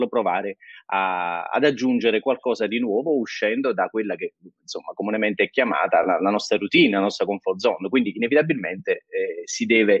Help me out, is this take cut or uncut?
uncut